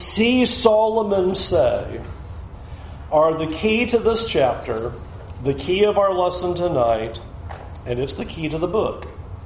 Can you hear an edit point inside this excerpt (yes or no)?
no